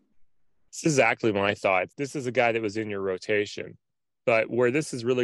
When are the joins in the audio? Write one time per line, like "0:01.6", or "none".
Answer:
0:01.9

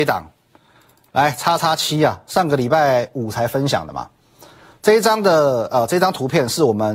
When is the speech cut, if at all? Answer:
0:01.6

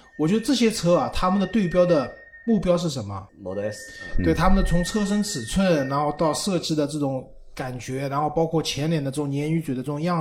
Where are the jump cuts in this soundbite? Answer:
0:03.3

